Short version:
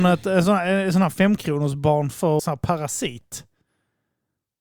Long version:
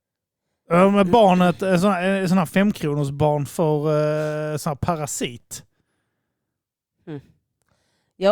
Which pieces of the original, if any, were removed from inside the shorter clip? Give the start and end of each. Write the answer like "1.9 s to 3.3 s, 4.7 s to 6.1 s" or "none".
3.8 s to 4.6 s